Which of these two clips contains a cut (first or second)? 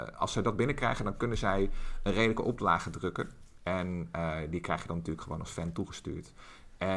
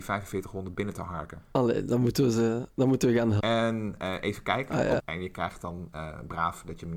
second